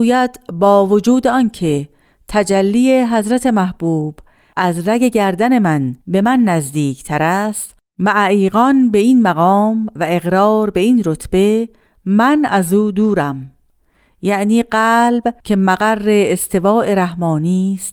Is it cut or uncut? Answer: cut